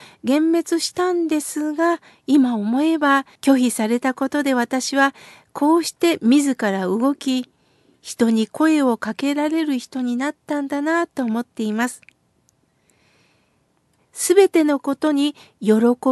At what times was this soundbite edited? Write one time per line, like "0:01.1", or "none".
0:03.4
0:14.0